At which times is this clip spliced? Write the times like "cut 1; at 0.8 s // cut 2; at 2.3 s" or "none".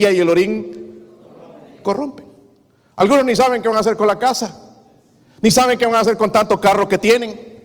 none